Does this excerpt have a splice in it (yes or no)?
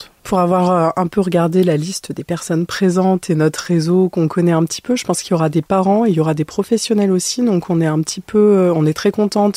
no